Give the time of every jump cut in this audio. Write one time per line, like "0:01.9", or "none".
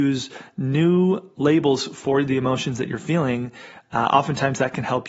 none